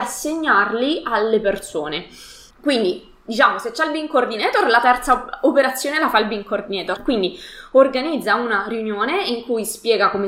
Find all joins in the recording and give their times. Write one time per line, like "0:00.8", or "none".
0:02.5
0:07.0